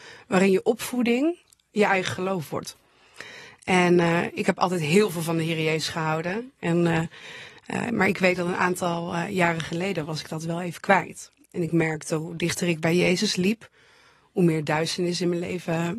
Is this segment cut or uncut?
uncut